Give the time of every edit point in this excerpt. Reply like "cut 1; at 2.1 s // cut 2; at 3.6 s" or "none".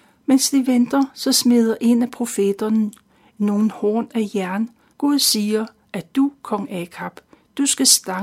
cut 1; at 4.9 s